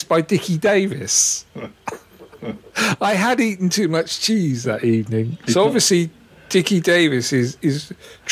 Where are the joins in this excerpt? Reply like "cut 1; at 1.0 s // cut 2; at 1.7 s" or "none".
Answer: cut 1; at 5.4 s